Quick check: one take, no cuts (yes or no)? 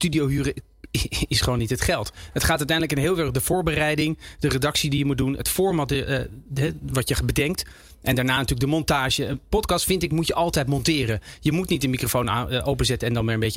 yes